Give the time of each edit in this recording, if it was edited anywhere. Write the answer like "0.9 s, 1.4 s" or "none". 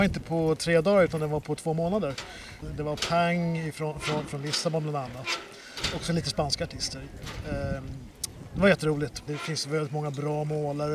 2.6 s, 9.3 s

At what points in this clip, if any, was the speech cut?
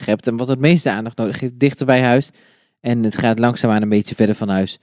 none

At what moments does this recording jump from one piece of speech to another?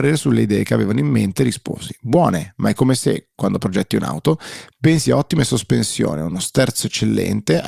none

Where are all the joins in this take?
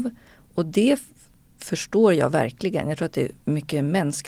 none

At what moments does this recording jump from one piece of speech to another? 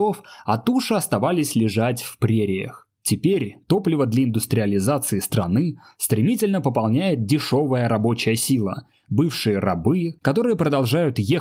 3.0 s, 10.2 s

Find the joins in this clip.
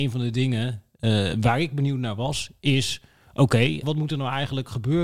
3.8 s

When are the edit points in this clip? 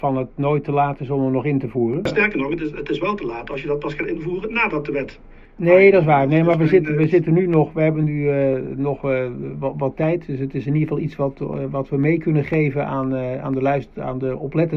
none

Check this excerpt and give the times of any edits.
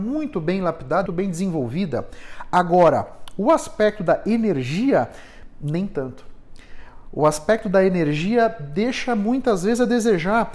1.1 s

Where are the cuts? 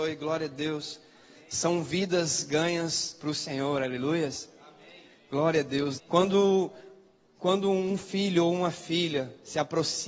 6.0 s

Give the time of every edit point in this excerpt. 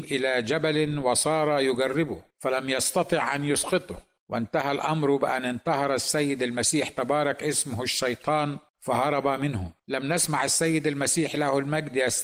2.3 s, 9.8 s

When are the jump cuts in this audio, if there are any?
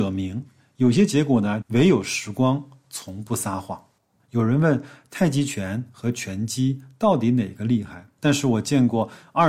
1.6 s, 4.2 s, 8.2 s

